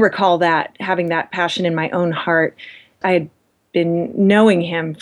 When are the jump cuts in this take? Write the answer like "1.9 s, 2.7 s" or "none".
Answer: 3.0 s